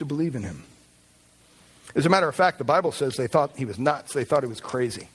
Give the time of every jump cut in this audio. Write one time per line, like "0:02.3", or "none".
none